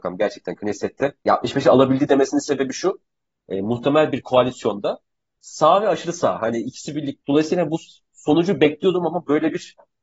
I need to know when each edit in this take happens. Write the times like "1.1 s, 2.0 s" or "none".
none